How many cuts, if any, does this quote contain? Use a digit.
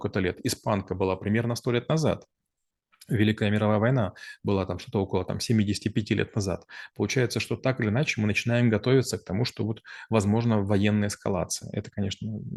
0